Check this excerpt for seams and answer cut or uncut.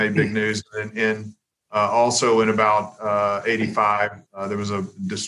cut